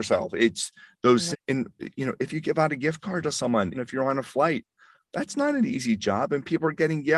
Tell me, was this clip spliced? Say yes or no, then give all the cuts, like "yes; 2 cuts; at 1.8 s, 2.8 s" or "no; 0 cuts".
yes; 2 cuts; at 1.3 s, 3.7 s